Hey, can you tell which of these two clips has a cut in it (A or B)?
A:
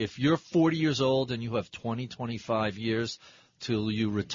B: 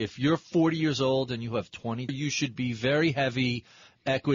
B